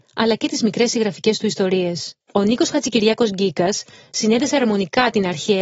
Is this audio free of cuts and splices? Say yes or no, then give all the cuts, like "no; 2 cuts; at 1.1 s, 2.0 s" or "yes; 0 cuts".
no; 1 cut; at 2.2 s